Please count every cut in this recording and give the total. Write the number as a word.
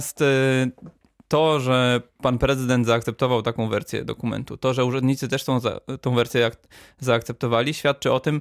zero